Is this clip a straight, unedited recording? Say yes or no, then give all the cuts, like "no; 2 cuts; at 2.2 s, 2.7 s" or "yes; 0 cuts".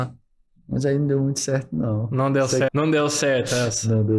no; 1 cut; at 2.7 s